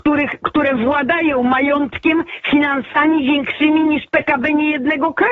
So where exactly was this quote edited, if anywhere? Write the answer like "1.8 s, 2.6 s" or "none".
none